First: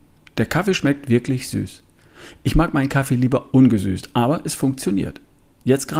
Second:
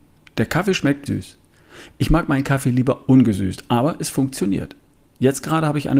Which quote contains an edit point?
second; 1 cut; at 1.1 s

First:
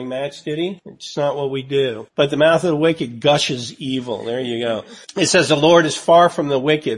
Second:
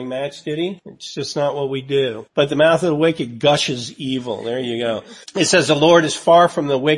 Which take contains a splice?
first; 1 cut; at 1.1 s

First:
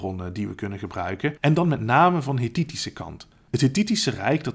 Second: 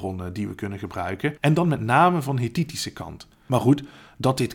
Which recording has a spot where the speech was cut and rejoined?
second; 1 cut; at 3.3 s

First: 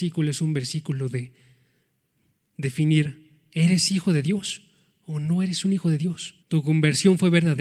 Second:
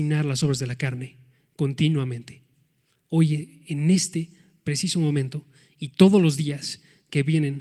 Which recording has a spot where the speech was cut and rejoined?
first; 1 cut; at 6.4 s

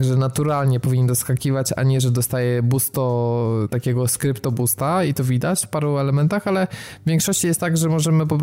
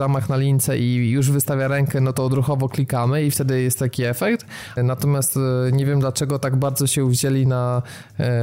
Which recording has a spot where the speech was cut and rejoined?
second; 1 cut; at 4.8 s

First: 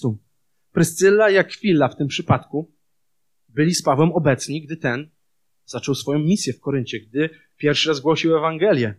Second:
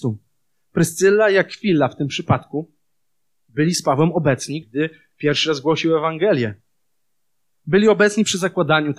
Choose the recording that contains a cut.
second; 1 cut; at 4.6 s

